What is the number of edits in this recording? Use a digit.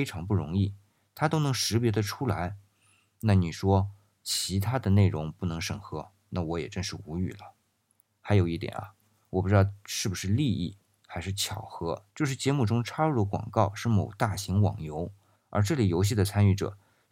1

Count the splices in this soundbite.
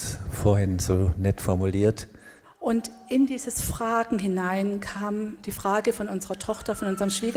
1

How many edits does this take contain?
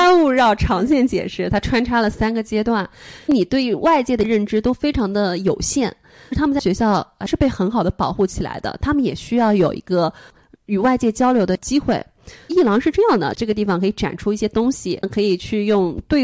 2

